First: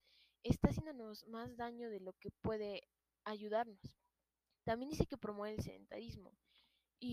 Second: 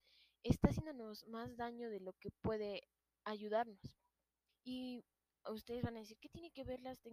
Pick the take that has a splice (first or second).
second